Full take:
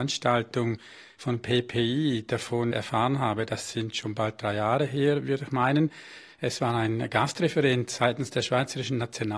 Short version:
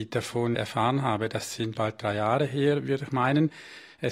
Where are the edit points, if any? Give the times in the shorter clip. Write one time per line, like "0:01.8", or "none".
0:01.7